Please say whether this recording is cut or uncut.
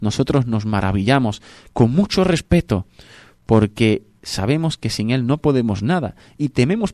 uncut